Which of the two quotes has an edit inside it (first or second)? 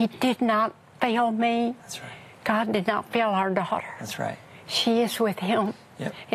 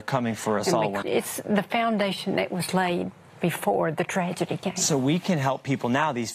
second